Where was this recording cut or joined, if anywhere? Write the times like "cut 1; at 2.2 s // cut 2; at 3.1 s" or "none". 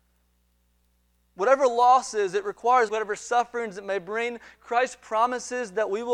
cut 1; at 2.9 s